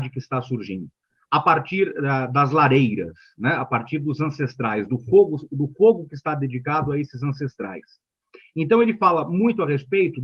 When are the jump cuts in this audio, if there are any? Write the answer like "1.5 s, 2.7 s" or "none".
none